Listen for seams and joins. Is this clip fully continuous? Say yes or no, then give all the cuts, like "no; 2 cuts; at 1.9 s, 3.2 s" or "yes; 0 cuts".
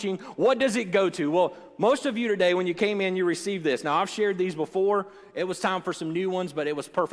yes; 0 cuts